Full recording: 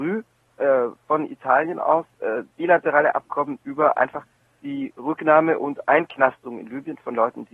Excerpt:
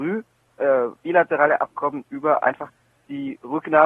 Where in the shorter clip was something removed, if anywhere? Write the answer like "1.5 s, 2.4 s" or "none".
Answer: 1.0 s